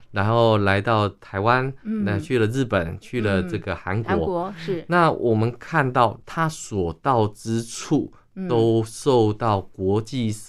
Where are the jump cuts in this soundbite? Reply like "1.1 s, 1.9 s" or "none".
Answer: 6.2 s